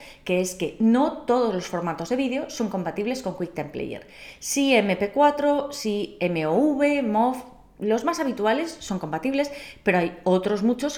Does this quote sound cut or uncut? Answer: uncut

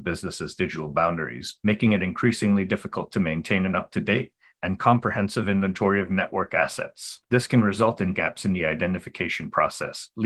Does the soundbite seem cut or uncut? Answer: uncut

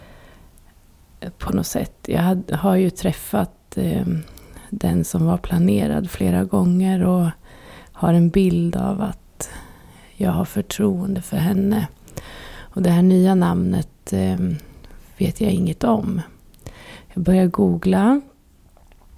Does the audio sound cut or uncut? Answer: uncut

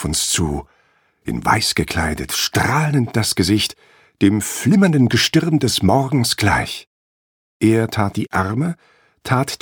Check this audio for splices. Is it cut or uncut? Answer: uncut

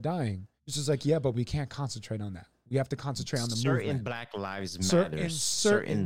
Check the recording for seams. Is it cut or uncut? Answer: uncut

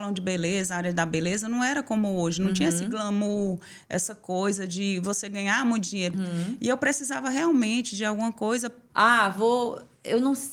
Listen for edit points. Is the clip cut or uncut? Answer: cut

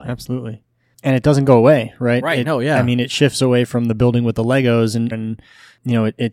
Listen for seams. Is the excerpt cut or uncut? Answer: cut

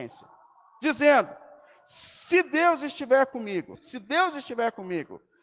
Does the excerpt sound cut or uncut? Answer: cut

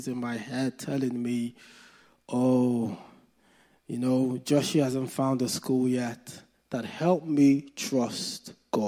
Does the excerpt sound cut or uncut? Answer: cut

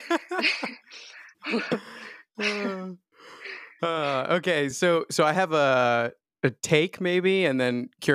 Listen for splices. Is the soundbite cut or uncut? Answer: uncut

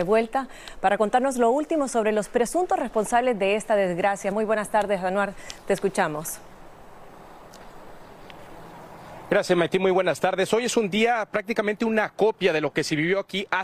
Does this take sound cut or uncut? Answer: uncut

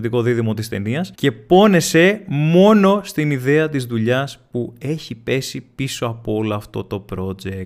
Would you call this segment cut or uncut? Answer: cut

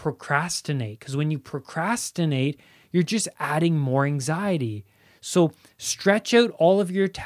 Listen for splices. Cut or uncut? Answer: uncut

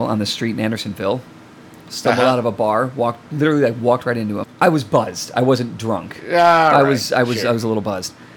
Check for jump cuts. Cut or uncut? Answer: cut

